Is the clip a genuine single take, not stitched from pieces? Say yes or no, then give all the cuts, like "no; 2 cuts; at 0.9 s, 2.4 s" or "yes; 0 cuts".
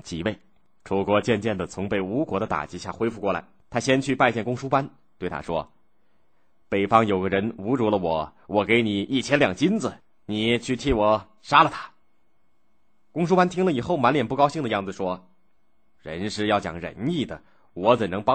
no; 1 cut; at 3.6 s